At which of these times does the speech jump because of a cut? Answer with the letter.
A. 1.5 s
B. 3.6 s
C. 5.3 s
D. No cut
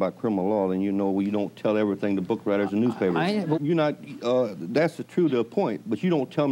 B